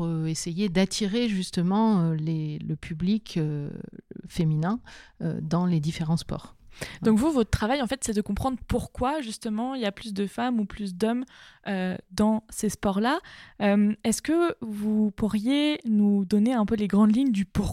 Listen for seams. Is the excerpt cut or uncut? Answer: uncut